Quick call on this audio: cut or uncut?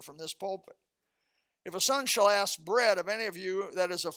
uncut